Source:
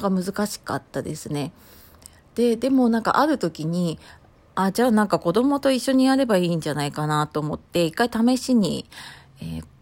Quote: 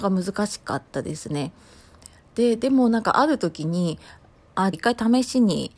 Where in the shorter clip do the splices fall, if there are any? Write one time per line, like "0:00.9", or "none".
0:04.7